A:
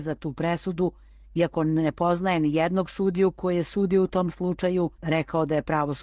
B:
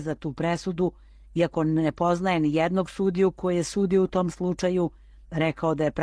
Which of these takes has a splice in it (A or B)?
A